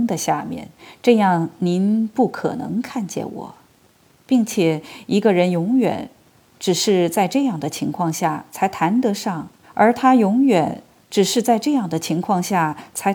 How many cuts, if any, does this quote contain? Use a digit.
1